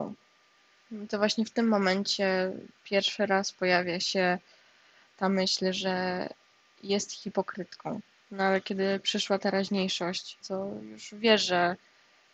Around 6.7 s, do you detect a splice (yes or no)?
no